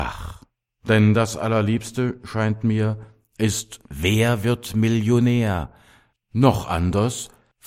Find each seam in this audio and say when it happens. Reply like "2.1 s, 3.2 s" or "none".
6.2 s